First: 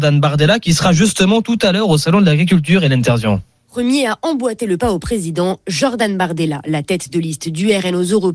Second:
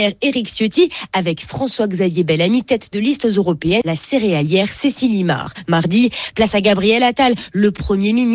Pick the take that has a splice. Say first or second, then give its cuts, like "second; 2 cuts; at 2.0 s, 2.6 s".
second; 1 cut; at 3.8 s